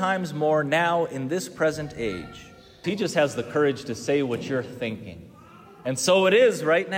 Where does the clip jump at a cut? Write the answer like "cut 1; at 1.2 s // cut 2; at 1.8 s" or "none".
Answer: cut 1; at 2.8 s